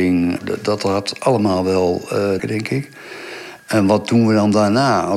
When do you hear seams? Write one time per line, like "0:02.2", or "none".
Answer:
0:02.4
0:03.6